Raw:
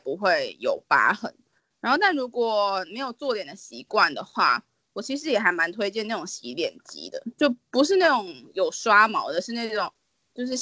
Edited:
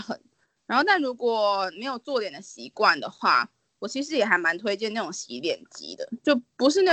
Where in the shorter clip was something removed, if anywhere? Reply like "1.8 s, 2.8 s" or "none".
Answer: none

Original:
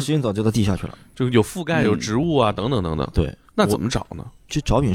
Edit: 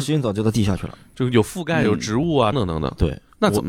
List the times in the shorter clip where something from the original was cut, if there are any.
2.5 s

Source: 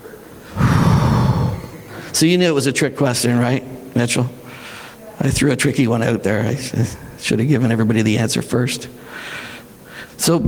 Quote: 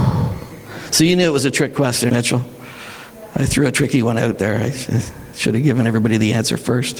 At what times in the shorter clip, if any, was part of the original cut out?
2.1 s

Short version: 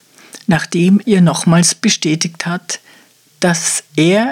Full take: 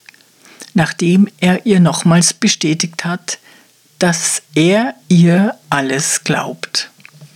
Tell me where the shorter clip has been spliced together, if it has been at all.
1.0 s

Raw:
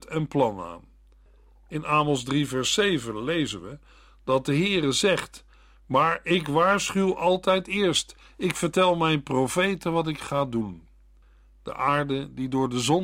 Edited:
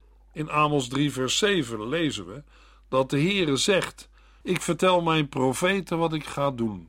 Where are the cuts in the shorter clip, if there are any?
4.4 s

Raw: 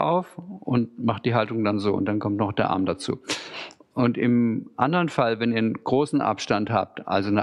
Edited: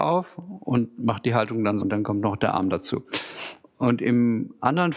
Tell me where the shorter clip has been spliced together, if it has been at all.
1.8 s

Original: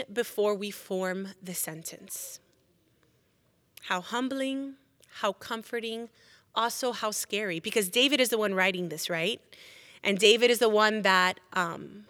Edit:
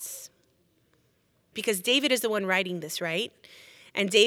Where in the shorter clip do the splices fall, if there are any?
1.5 s

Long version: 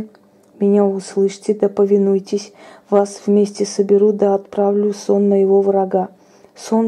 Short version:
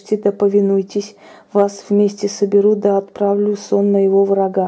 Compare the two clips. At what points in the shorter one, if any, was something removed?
none

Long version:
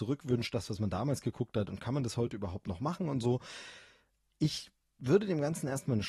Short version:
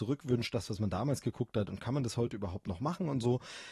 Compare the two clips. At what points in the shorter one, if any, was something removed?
none

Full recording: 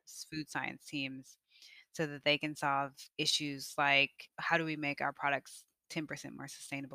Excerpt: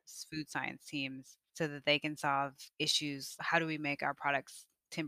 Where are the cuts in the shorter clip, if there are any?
1.5 s, 3.4 s

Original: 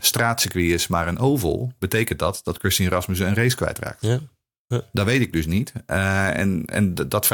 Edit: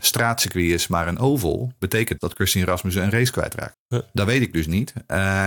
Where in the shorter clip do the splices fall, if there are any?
2.2 s, 3.7 s

